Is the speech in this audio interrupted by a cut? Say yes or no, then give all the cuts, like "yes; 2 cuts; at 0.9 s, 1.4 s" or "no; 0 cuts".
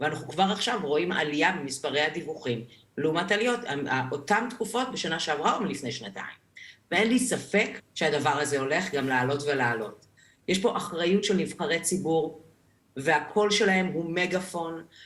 yes; 1 cut; at 7.8 s